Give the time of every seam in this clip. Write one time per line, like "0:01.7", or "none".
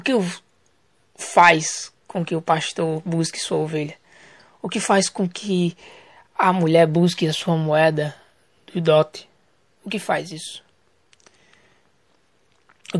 none